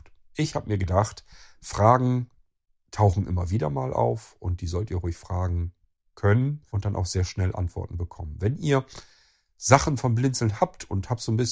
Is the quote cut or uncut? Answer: cut